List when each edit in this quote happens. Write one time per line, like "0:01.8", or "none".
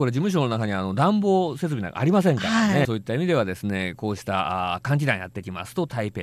0:02.8